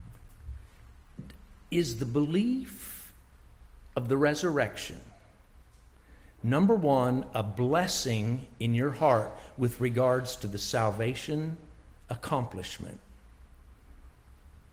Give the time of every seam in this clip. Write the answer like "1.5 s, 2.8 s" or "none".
none